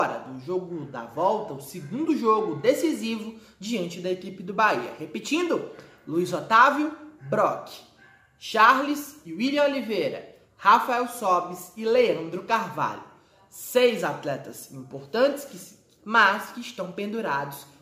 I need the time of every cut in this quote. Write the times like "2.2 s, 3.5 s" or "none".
16.0 s